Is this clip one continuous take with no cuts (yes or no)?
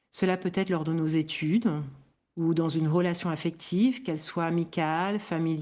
yes